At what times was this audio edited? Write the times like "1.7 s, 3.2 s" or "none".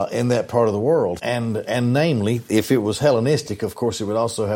1.2 s